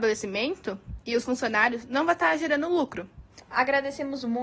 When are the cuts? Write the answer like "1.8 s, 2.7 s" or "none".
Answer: 3.4 s